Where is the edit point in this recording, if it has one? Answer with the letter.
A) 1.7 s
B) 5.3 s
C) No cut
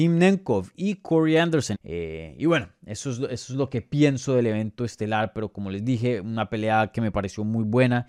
A